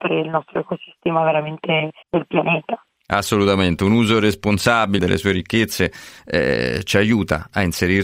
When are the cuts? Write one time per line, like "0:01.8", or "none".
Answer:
0:02.0
0:05.0